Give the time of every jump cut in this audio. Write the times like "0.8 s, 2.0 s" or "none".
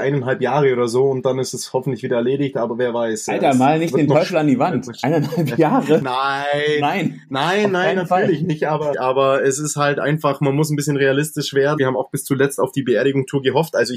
8.9 s, 11.8 s

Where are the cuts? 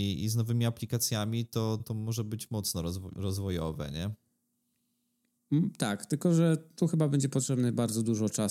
1.8 s

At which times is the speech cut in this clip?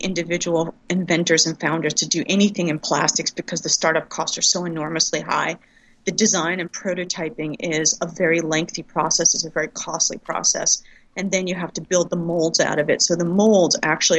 none

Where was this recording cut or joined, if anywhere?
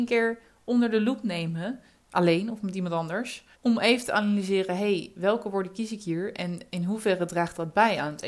3.5 s

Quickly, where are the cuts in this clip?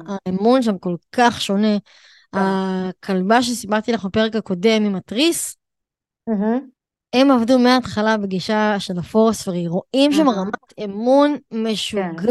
none

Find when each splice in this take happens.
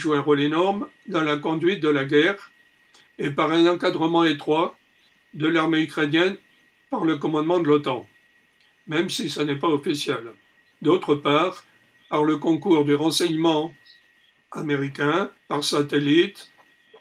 10.7 s, 15.4 s

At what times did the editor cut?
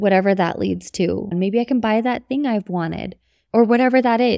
1.3 s

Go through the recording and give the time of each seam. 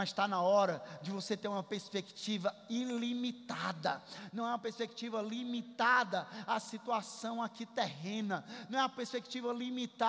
none

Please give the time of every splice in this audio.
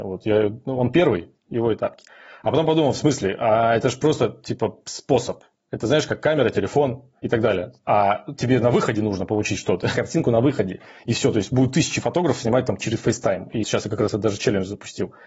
13.6 s

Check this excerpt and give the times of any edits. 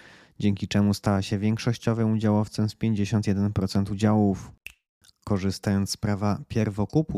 5.1 s

